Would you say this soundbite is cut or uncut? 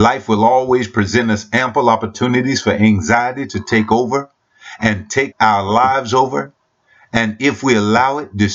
cut